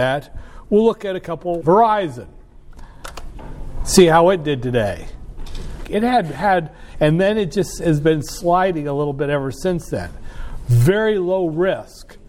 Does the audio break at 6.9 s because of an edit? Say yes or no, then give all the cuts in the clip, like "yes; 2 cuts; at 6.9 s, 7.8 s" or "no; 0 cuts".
yes; 3 cuts; at 1.6 s, 5.8 s, 6.9 s